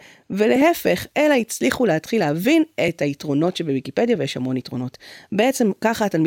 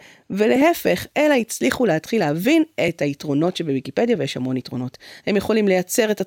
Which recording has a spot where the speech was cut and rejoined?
second; 1 cut; at 5.2 s

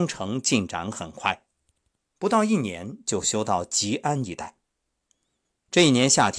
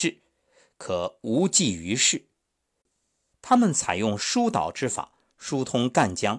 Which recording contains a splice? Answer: second; 1 cut; at 3.3 s

